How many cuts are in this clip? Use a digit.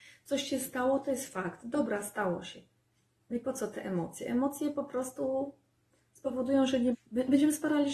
1